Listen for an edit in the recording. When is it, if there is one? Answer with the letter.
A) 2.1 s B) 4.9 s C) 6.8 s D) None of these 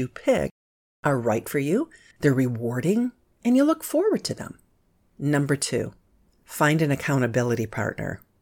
A